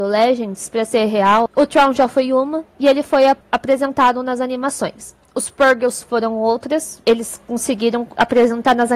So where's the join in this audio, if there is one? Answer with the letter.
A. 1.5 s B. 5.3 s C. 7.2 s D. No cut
A